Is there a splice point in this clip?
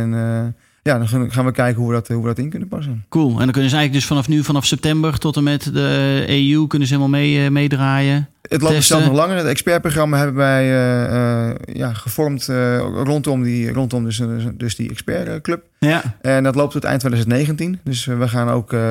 no; 0 cuts

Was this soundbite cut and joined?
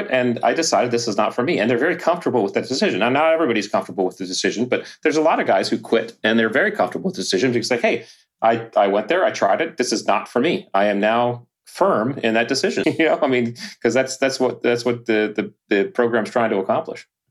yes; 1 cut; at 12.8 s

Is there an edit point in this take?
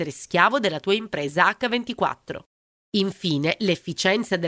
no; 0 cuts

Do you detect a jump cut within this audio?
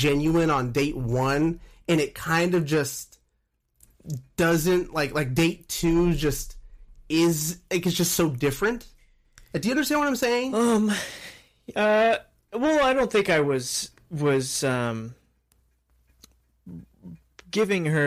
no; 0 cuts

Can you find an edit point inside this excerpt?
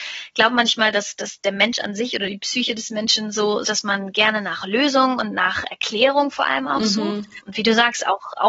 yes; 2 cuts; at 3.6 s, 7.4 s

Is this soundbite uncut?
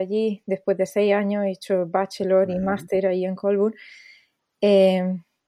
yes; 0 cuts

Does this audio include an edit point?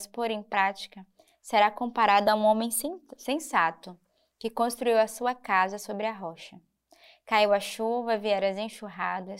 no; 0 cuts

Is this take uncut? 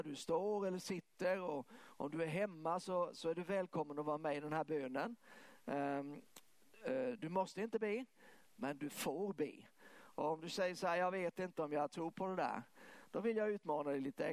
yes; 0 cuts

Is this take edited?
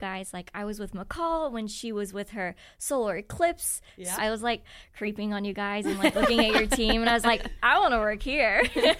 yes; 1 cut; at 4.2 s

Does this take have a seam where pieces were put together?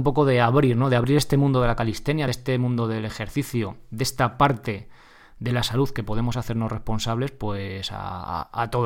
no; 0 cuts

